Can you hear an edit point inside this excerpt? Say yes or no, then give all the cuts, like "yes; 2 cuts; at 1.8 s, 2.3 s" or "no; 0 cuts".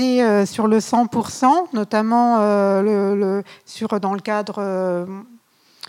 no; 0 cuts